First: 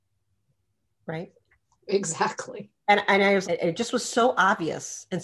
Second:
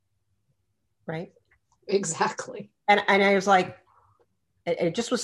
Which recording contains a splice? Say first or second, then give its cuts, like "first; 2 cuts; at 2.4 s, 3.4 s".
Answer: first; 1 cut; at 3.4 s